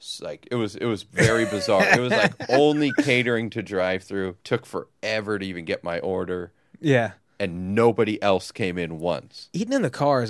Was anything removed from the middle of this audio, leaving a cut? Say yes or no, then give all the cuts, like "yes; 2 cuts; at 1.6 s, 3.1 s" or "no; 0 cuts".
yes; 1 cut; at 4.4 s